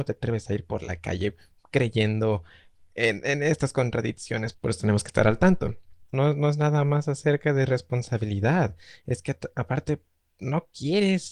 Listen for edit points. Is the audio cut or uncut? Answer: cut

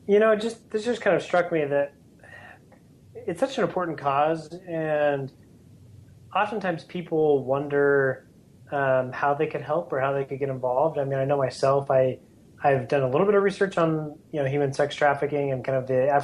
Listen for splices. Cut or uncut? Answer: uncut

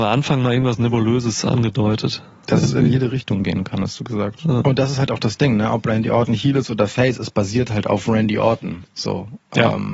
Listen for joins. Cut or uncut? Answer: cut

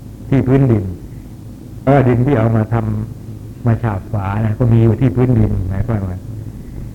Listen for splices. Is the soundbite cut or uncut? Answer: cut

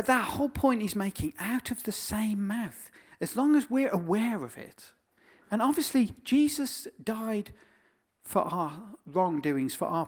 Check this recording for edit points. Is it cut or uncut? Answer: uncut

